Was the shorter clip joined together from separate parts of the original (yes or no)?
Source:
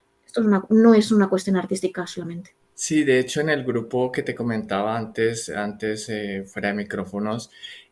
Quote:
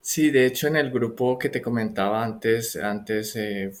no